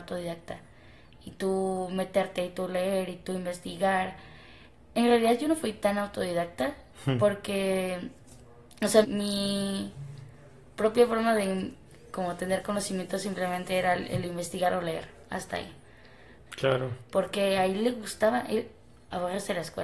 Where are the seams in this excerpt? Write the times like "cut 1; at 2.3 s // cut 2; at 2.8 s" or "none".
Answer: cut 1; at 9.0 s // cut 2; at 16.5 s